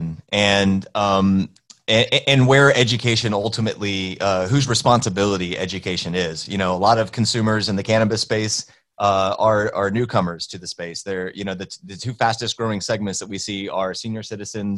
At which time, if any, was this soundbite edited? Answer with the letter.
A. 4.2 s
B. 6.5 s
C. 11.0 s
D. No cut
D